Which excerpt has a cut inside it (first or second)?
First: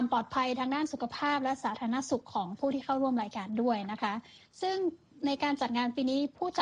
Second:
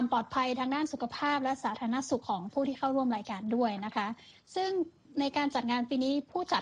second